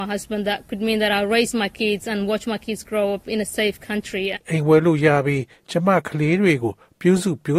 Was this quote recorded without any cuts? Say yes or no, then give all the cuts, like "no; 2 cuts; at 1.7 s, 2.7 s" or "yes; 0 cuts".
no; 1 cut; at 4.3 s